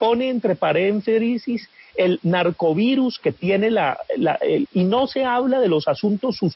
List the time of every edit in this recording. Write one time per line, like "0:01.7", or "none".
0:04.7